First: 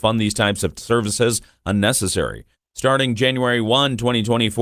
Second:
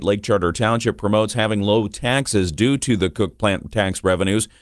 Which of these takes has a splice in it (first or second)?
first